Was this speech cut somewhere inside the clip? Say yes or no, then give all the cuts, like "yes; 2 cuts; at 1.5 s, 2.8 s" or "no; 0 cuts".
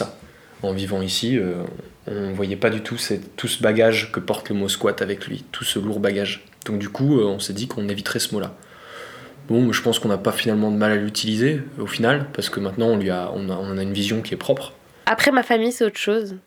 yes; 2 cuts; at 2.0 s, 15.0 s